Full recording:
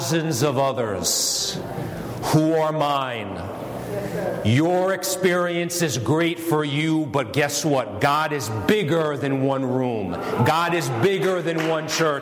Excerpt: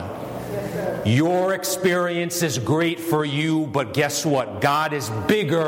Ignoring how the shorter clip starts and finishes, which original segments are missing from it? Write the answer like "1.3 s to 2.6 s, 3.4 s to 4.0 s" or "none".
none